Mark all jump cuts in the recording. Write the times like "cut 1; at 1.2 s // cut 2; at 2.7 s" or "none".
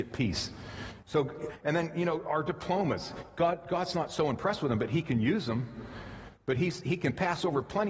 cut 1; at 1.0 s